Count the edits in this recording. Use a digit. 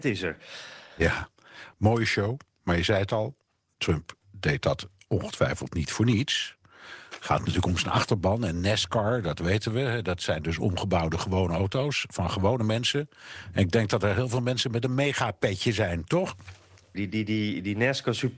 2